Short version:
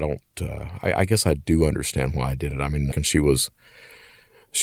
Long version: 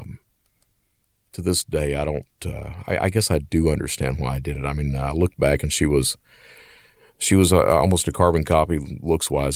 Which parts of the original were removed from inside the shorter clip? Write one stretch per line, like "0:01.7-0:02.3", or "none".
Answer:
0:05.0-0:05.6